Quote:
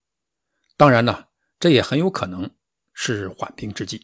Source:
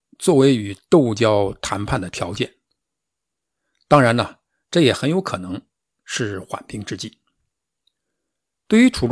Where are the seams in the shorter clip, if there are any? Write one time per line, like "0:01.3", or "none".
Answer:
none